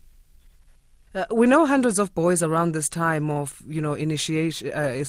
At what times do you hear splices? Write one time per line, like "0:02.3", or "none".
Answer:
0:01.1